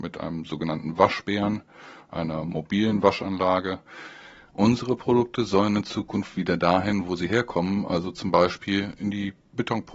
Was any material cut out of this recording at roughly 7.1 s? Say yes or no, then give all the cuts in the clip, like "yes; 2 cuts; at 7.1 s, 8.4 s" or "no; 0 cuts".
no; 1 cut; at 4.5 s